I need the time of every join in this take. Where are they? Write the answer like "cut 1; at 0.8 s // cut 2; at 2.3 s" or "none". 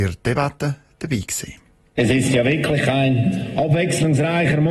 none